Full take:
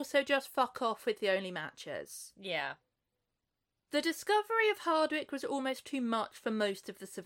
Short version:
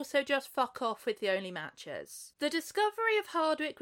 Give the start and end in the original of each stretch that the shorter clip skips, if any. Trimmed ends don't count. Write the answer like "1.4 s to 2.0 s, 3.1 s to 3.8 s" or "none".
2.3 s to 3.9 s